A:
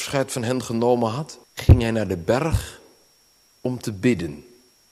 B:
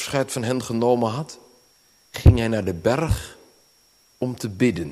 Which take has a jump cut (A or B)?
A